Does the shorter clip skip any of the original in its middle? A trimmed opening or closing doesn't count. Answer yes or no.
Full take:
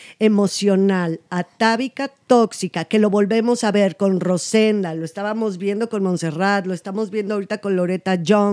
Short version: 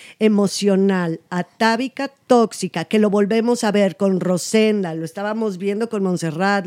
no